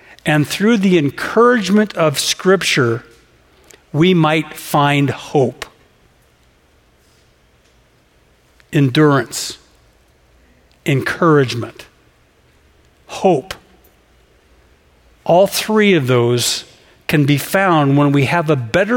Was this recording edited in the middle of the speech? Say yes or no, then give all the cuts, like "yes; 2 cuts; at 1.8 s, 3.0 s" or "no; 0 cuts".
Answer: no; 0 cuts